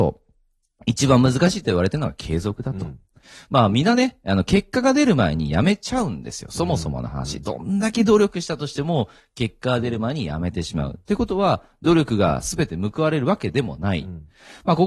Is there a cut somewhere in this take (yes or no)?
no